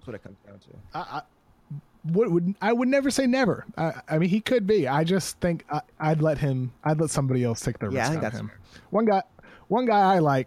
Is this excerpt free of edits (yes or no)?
yes